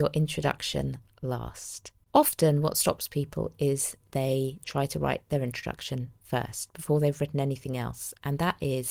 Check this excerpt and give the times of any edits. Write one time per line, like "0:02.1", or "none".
none

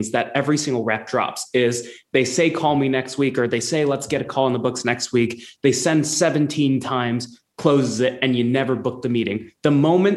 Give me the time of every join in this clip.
0:07.5

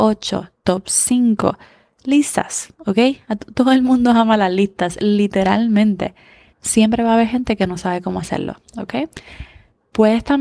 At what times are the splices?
0:06.5

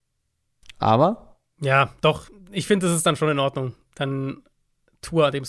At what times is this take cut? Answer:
none

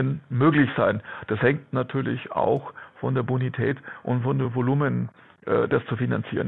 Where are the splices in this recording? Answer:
none

